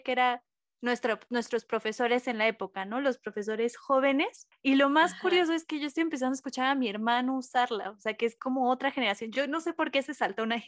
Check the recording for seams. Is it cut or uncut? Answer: uncut